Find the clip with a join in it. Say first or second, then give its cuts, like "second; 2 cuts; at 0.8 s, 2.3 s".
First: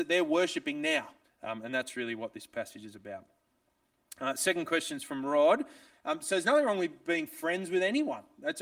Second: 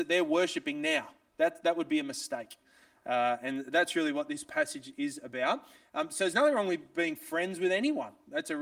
first; 2 cuts; at 1.2 s, 5.9 s